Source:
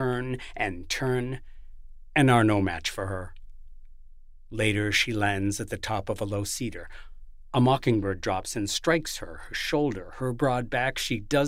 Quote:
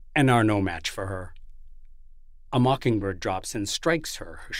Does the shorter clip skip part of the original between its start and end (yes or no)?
yes